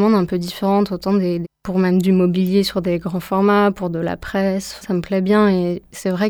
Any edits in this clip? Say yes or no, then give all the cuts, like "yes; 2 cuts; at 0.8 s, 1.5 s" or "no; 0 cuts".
yes; 2 cuts; at 1.4 s, 4.8 s